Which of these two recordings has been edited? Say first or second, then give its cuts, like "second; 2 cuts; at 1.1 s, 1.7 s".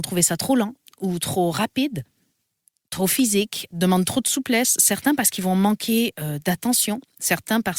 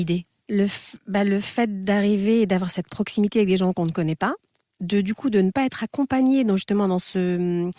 first; 1 cut; at 3.7 s